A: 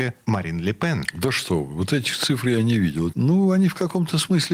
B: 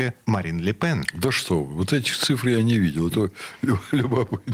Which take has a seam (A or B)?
A